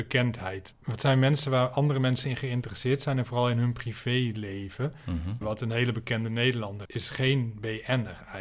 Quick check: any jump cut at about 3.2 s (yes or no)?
no